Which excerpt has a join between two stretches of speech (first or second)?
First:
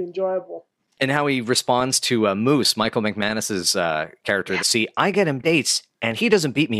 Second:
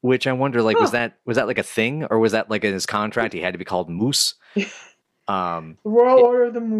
first